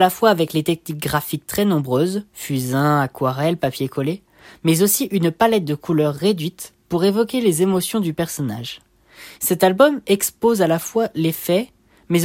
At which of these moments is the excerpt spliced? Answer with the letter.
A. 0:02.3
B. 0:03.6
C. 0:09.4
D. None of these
C